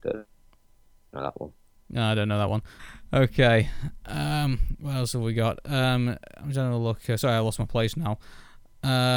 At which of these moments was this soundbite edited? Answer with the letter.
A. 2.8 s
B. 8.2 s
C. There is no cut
A